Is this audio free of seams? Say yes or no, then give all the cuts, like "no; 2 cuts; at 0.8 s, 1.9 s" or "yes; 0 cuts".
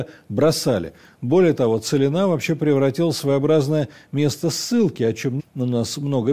no; 1 cut; at 5.4 s